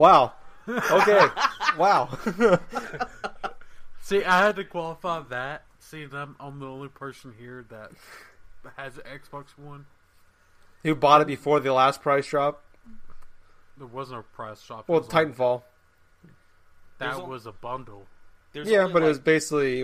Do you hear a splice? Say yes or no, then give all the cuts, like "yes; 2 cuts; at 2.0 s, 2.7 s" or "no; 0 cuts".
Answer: yes; 1 cut; at 13.8 s